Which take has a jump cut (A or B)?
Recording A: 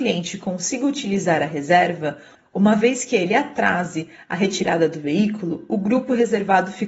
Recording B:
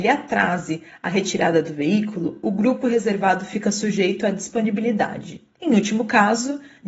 B